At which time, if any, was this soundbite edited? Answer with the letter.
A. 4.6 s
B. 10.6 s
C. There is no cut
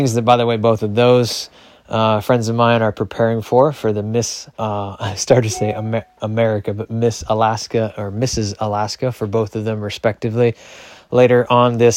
A